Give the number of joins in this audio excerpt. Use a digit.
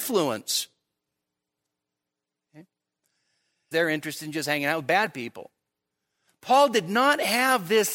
2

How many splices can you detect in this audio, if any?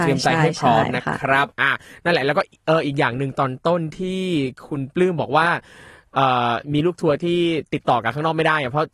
1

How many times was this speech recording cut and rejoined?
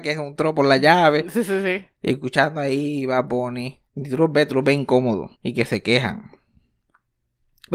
2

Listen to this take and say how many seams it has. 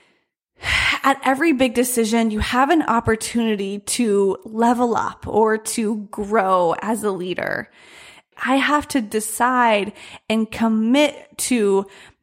1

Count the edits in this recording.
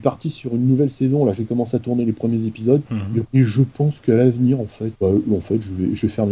2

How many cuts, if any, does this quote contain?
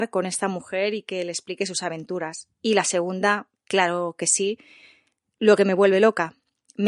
1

